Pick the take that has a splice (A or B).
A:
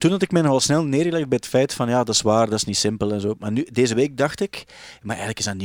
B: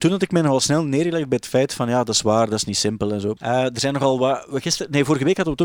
B